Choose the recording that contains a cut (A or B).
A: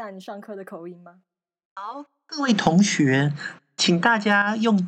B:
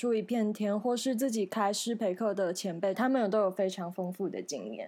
B